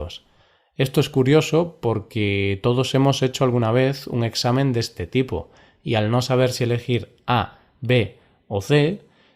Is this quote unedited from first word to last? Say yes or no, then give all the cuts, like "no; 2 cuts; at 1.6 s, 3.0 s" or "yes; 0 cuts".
yes; 0 cuts